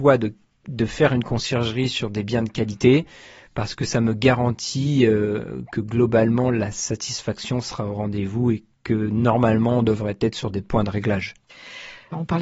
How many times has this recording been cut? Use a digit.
0